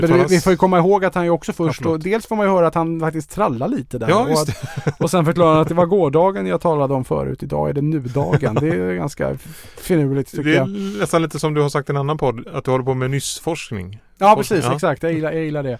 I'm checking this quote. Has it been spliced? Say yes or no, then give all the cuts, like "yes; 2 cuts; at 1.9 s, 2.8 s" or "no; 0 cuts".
no; 0 cuts